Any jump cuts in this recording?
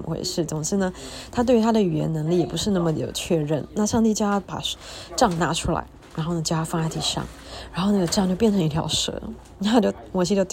no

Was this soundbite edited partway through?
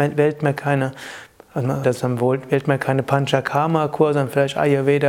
yes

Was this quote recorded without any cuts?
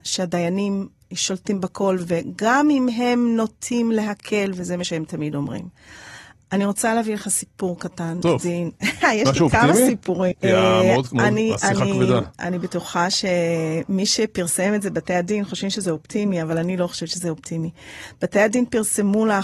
no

